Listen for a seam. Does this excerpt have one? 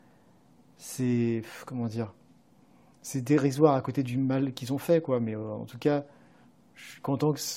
no; 0 cuts

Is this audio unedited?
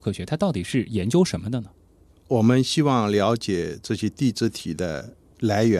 no; 1 cut; at 2.1 s

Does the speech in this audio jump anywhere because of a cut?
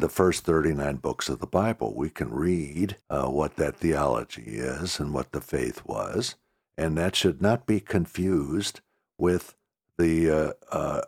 yes; 1 cut; at 3.0 s

